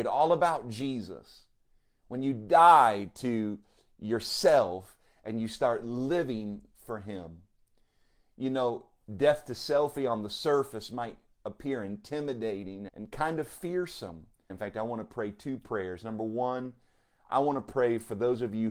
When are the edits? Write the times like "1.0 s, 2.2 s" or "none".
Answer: 12.9 s, 14.5 s